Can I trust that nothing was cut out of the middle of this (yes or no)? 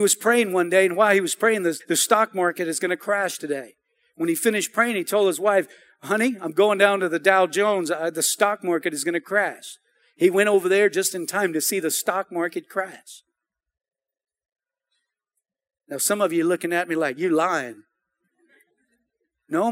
no